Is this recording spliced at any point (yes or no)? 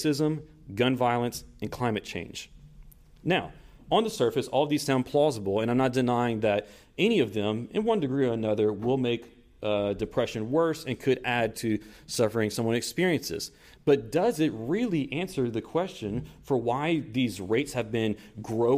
no